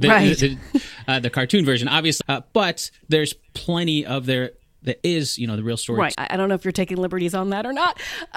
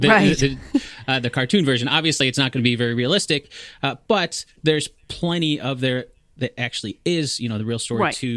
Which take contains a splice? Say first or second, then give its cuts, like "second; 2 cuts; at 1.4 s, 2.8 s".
first; 3 cuts; at 2.2 s, 5.0 s, 6.1 s